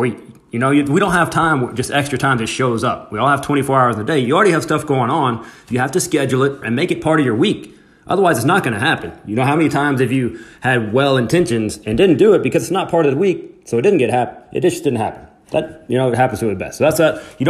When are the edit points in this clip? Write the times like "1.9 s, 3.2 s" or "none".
6.6 s